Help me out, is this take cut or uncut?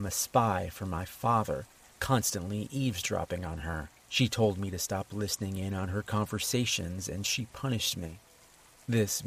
cut